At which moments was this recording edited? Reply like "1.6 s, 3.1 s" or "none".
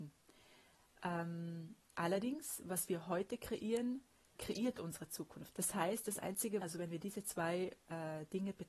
4.4 s, 5.5 s, 6.6 s